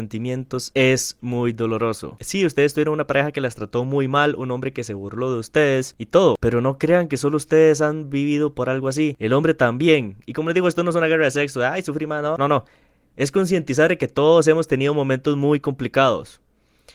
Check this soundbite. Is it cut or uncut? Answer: cut